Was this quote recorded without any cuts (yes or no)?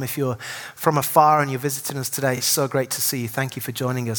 yes